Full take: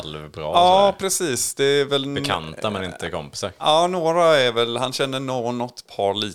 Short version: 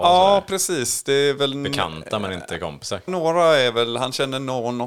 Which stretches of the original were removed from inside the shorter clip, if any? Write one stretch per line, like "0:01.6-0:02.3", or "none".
0:03.6-0:03.9